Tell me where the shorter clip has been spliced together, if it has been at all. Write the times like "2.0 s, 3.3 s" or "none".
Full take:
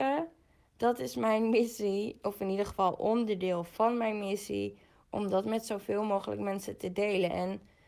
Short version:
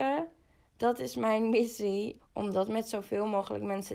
2.2 s